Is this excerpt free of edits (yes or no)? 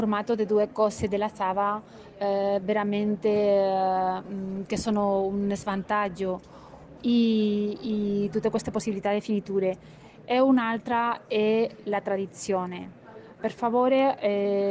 no